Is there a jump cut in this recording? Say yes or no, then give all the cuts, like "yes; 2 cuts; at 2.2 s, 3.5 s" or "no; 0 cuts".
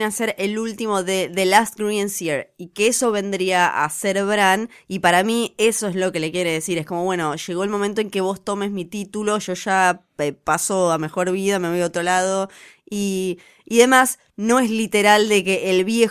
no; 0 cuts